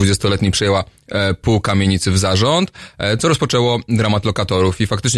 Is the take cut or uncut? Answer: uncut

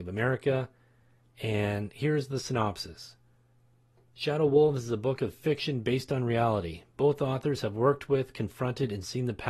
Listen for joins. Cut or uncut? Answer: uncut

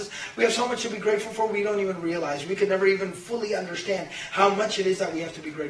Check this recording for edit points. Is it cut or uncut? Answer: uncut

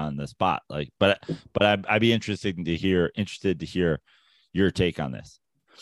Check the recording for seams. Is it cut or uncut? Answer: uncut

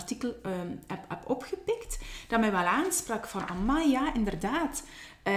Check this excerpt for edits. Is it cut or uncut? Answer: uncut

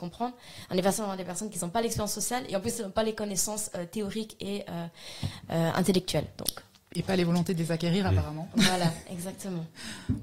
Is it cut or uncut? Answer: uncut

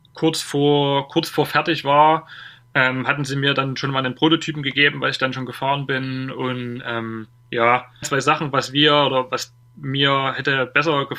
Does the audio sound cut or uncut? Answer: cut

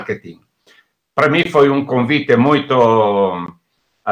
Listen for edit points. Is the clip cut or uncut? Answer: uncut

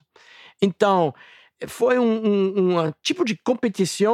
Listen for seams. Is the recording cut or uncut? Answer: uncut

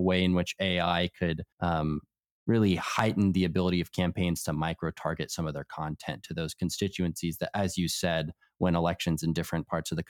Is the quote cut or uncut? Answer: cut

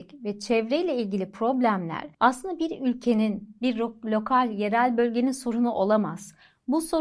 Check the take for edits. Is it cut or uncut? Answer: uncut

